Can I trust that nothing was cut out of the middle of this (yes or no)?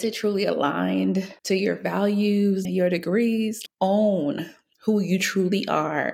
no